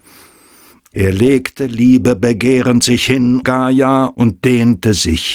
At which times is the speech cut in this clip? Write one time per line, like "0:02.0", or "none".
0:00.9
0:03.4